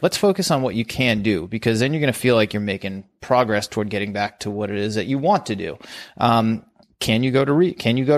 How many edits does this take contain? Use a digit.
1